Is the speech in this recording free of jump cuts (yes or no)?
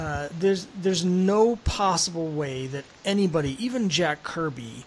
yes